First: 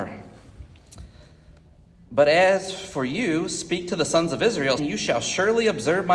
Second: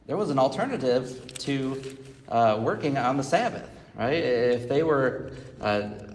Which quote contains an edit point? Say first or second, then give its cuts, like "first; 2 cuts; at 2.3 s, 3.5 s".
first; 1 cut; at 4.8 s